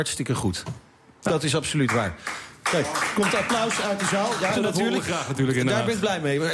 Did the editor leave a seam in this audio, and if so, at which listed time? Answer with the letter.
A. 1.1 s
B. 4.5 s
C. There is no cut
B